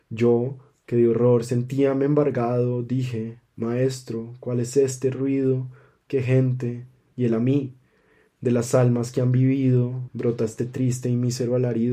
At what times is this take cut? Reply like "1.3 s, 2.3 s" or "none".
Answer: 7.1 s, 10.1 s